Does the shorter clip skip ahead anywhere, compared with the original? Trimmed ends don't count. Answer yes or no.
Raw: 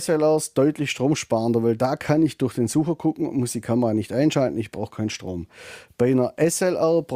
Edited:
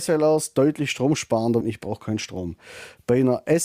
yes